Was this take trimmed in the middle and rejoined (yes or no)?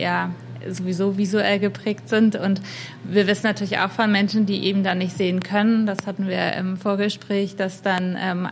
no